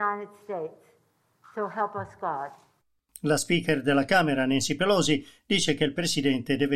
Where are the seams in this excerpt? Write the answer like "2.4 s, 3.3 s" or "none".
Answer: 3.1 s